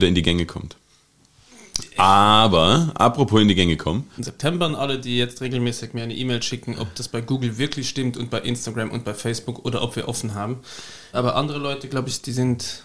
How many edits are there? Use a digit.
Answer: 2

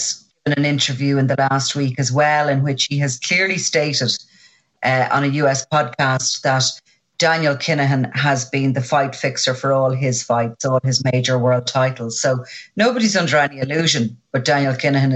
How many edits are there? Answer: 0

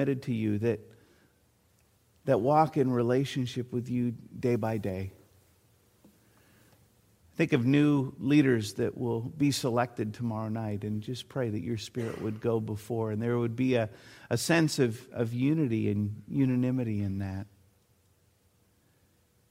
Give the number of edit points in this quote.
1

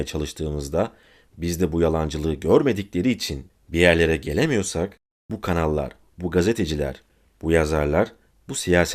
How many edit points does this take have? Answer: 0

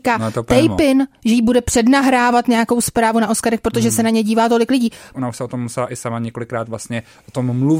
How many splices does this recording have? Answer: 1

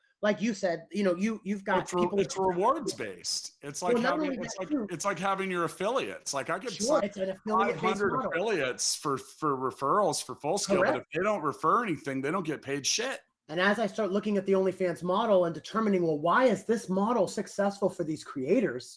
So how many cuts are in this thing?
3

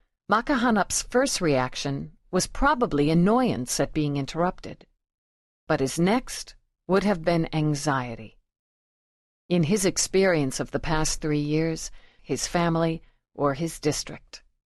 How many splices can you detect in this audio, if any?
1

